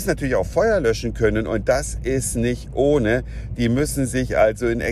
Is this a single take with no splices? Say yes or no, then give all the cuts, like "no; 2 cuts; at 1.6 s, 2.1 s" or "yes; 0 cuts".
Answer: yes; 0 cuts